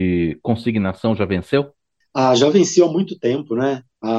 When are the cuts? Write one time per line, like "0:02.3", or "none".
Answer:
none